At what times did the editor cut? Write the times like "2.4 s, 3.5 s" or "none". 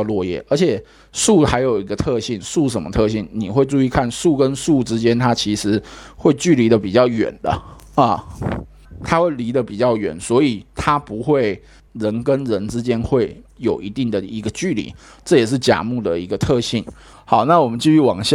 11.9 s, 17.1 s